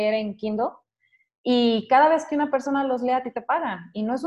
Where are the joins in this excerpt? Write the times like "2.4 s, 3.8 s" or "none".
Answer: none